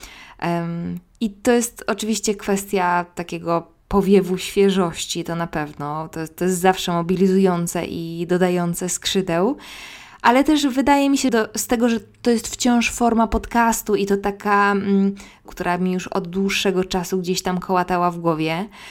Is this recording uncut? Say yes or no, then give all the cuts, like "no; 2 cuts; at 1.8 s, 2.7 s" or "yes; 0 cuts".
no; 2 cuts; at 11.3 s, 15.5 s